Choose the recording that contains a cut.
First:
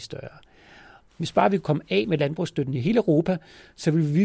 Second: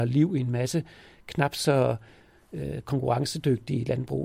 first; 1 cut; at 1.1 s

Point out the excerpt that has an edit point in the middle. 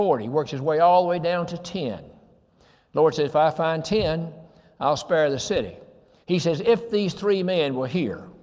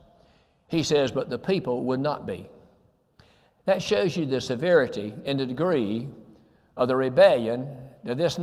first; 1 cut; at 6.2 s

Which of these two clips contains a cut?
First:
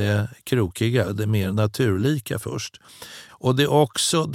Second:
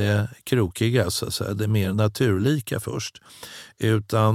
first; 2 cuts; at 1.0 s, 3.3 s

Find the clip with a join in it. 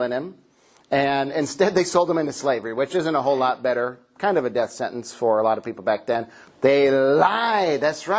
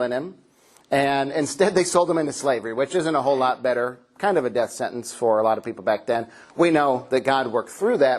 first; 1 cut; at 6.5 s

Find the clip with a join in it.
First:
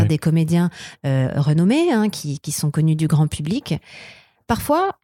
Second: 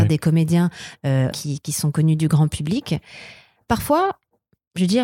second; 1 cut; at 1.3 s

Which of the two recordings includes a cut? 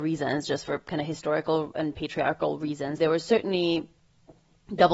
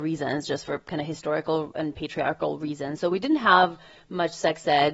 first; 1 cut; at 3.0 s

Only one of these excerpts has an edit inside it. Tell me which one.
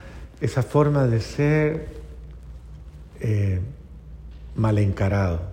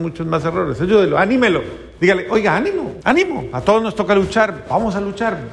second; 1 cut; at 3.0 s

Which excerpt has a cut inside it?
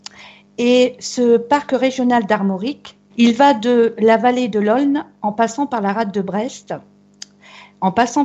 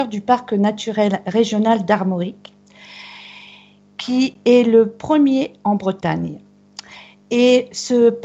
first; 1 cut; at 3.1 s

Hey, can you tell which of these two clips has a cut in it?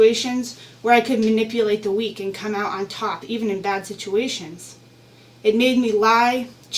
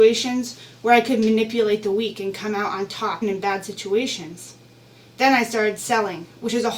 second; 2 cuts; at 3.2 s, 5.1 s

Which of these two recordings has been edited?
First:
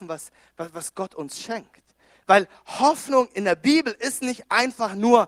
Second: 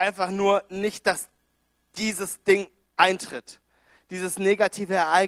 first; 1 cut; at 2.2 s

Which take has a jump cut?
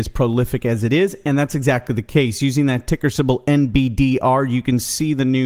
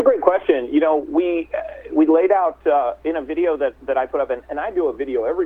second; 1 cut; at 1.9 s

